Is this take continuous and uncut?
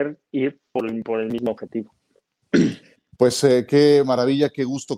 yes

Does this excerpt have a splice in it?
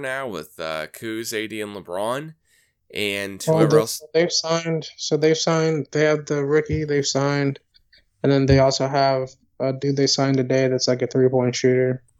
no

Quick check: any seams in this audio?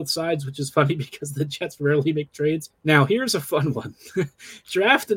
yes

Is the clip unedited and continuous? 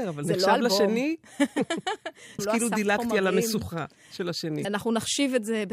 no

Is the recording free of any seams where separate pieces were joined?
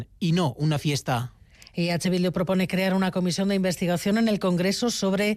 yes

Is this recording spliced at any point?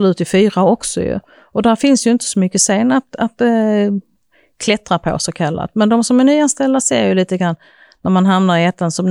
no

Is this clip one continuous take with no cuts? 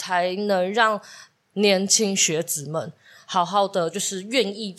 yes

